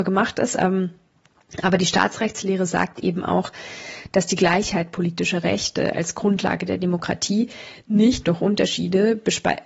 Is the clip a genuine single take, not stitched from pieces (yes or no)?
yes